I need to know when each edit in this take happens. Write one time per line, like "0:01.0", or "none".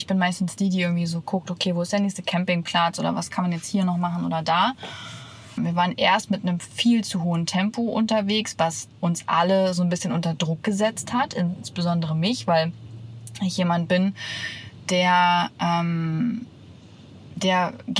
0:05.6

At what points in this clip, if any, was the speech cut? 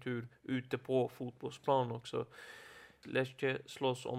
0:03.0

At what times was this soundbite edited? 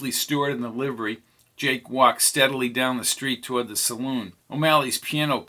0:04.4

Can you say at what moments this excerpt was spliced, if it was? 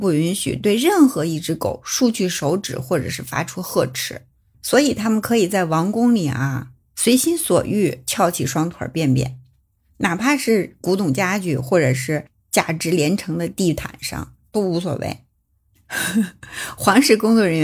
none

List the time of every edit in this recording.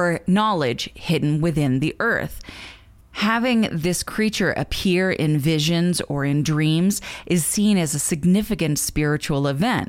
none

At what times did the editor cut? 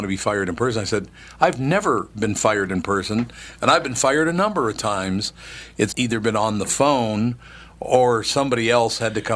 0:05.9

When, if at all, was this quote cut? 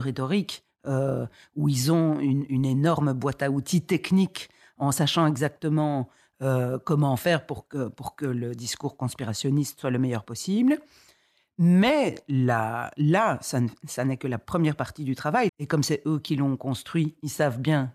0:15.5

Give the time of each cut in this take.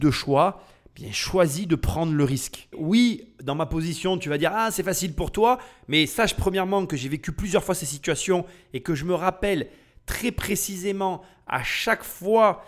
0:02.7

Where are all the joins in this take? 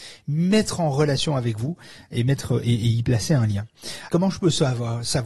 0:04.1

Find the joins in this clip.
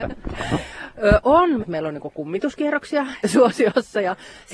0:01.6
0:03.2

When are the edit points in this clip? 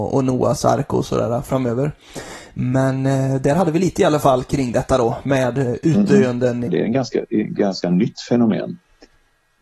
0:06.7

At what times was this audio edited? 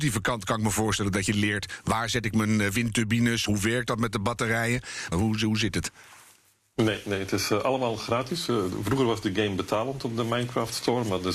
0:03.5
0:05.1

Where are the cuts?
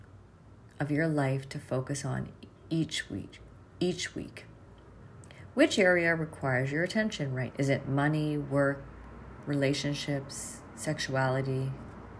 0:07.5

